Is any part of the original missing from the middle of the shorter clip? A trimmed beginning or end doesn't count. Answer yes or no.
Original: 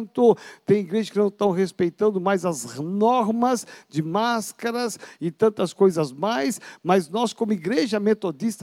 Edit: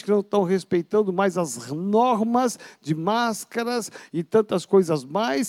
no